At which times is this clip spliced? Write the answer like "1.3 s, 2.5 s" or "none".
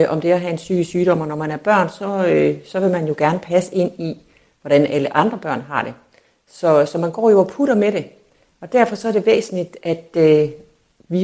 none